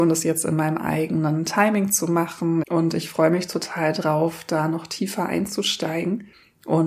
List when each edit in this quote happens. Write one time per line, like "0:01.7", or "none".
0:02.6